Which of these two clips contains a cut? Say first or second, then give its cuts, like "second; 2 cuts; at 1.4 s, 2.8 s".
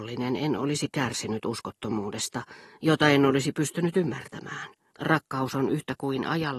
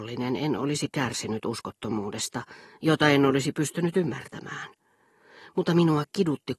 first; 1 cut; at 4.9 s